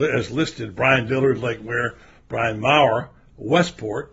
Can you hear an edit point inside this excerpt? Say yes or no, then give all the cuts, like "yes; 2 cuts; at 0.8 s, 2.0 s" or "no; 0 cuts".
no; 0 cuts